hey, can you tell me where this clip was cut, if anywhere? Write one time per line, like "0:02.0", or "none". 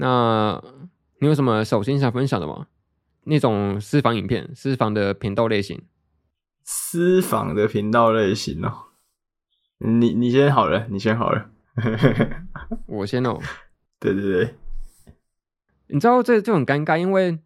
none